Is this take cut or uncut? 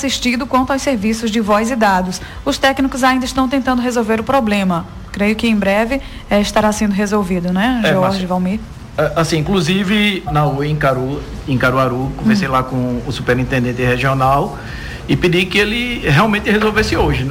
cut